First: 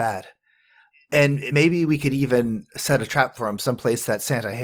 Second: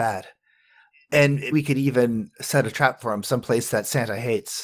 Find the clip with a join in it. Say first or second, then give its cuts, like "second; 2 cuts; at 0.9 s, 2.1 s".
second; 1 cut; at 1.5 s